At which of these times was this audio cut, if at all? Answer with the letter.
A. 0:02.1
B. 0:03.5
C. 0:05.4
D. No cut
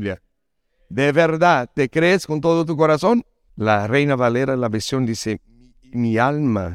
B